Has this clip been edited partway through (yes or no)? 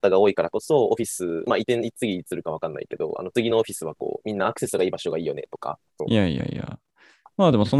yes